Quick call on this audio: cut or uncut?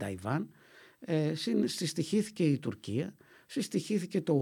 uncut